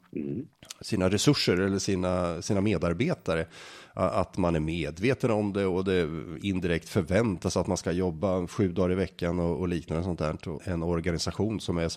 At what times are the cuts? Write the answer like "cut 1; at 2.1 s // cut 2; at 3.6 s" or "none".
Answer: cut 1; at 10.6 s